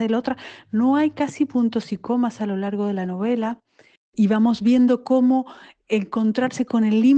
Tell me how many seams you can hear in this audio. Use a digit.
1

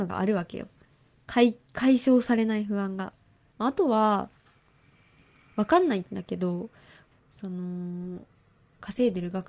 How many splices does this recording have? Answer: 2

